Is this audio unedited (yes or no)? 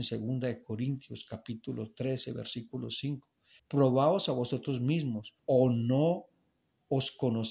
no